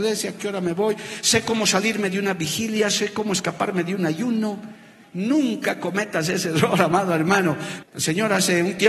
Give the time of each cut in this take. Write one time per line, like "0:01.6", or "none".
0:05.0
0:07.8